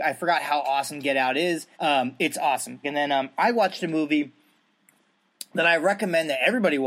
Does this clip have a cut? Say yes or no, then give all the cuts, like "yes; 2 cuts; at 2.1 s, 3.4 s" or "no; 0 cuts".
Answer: yes; 2 cuts; at 1.7 s, 2.8 s